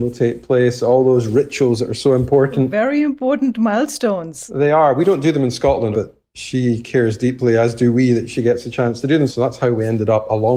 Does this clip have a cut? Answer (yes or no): yes